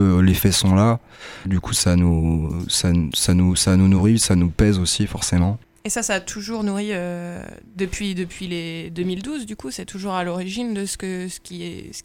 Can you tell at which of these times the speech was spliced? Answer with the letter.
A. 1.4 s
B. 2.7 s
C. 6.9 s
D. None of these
A